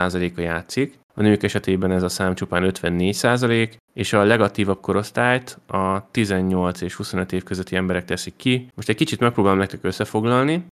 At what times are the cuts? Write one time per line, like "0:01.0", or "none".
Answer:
0:08.7